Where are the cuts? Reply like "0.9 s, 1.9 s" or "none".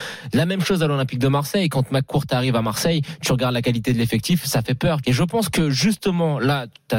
5.0 s